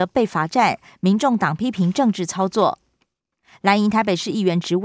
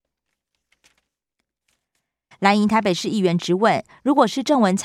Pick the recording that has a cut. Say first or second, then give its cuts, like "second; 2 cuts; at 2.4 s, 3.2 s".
second; 1 cut; at 2.3 s